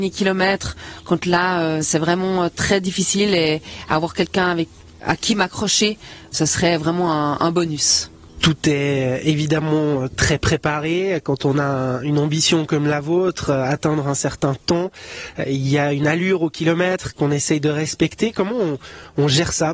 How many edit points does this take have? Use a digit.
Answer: 0